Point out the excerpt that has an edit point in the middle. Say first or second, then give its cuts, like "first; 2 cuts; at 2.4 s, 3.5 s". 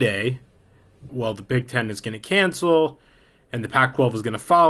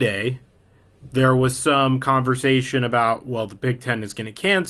first; 1 cut; at 1.1 s